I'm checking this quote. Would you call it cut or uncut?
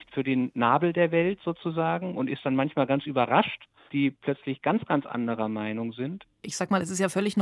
cut